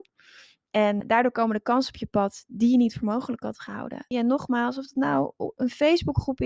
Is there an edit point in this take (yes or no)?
yes